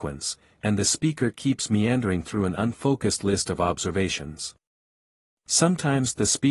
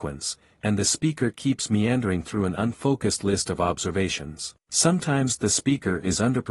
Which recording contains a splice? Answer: second; 1 cut; at 4.6 s

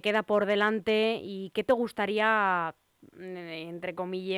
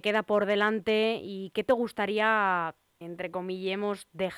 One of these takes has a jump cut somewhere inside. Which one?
second; 1 cut; at 3.0 s

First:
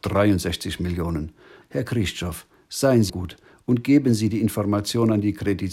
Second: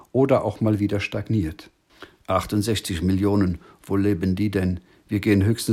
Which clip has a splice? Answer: first; 2 cuts; at 1.6 s, 3.1 s

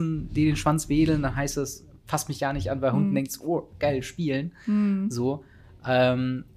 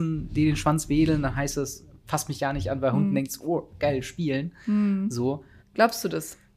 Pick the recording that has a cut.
second; 1 cut; at 5.6 s

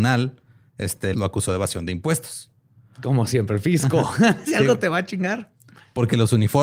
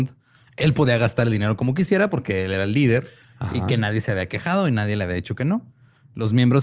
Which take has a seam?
first; 1 cut; at 1.1 s

